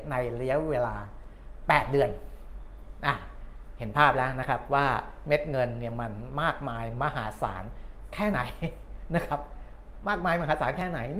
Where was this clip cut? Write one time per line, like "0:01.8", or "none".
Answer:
none